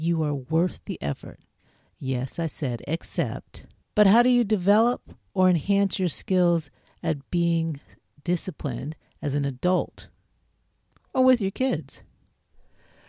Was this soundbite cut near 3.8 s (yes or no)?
yes